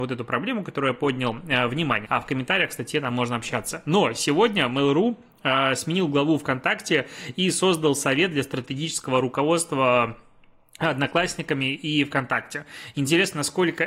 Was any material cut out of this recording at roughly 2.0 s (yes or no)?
yes